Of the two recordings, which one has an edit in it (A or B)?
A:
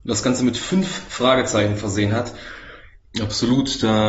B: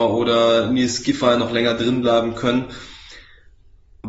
A